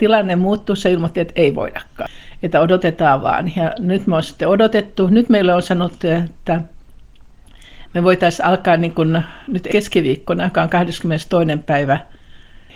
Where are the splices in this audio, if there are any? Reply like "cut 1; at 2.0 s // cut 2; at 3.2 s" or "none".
none